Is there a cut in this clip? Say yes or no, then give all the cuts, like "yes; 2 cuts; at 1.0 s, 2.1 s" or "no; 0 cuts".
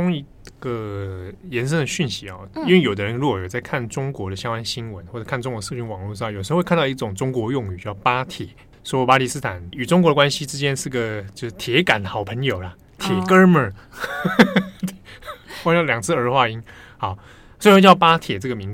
no; 0 cuts